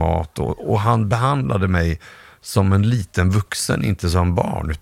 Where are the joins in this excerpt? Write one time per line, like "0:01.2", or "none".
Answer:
none